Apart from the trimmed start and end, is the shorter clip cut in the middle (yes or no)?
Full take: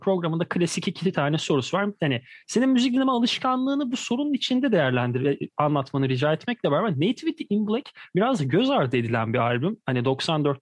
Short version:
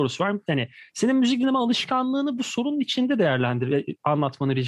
no